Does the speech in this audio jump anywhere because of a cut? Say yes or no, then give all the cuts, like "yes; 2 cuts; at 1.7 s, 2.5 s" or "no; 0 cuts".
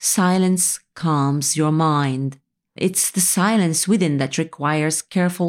yes; 1 cut; at 2.8 s